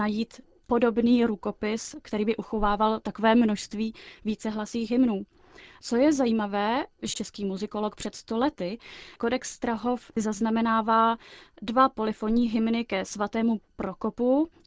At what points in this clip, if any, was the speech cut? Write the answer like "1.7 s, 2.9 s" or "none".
7.1 s